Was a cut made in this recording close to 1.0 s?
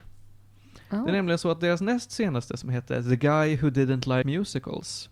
no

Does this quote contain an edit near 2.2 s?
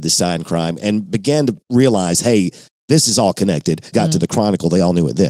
no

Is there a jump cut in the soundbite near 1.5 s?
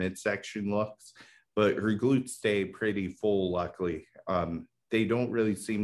no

